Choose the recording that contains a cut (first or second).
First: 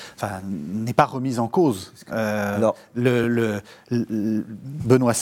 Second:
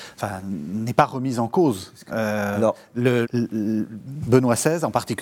second